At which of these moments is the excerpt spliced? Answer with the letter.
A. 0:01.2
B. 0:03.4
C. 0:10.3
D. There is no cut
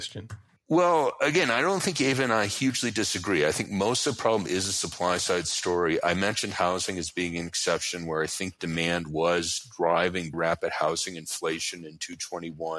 C